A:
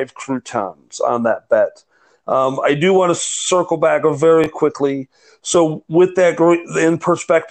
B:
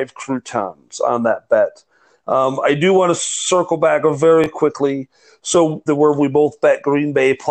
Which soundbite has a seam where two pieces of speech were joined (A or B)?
B